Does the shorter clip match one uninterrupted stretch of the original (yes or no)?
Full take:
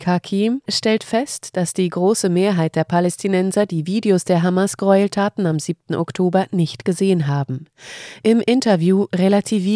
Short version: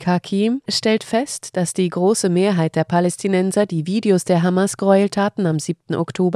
yes